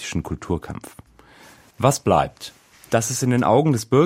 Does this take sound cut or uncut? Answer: cut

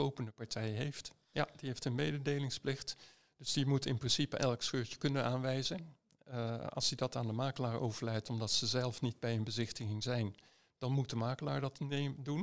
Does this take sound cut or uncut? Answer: cut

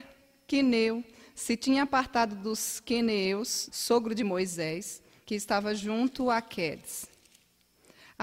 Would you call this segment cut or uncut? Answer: cut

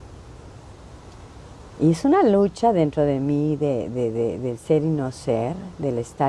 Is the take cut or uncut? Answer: uncut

